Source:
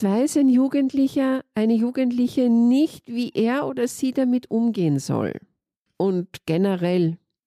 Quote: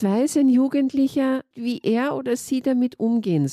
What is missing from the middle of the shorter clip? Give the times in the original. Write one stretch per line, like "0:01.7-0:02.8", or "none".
0:01.5-0:03.0